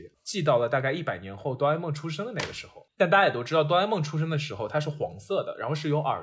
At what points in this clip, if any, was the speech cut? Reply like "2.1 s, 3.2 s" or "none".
none